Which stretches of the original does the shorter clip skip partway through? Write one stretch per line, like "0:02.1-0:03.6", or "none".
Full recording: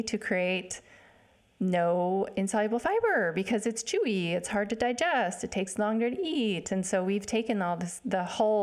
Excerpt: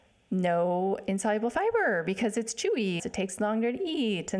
0:04.3-0:05.4